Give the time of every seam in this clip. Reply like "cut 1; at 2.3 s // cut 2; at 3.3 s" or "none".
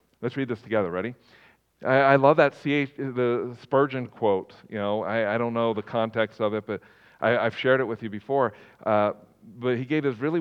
cut 1; at 1.7 s